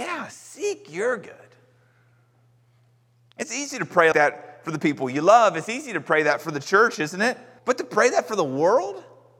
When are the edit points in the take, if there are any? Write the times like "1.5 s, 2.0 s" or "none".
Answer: 4.1 s, 7.6 s